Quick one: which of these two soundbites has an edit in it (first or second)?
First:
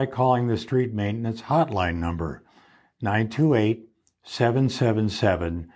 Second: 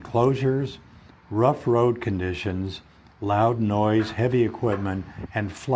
second